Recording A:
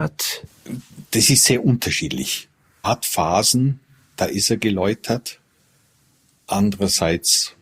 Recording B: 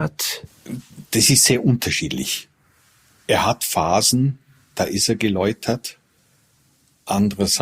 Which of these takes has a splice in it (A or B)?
A